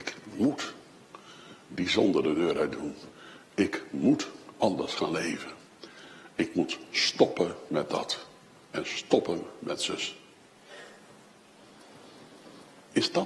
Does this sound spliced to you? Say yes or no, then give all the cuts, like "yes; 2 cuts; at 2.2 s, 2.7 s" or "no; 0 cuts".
no; 0 cuts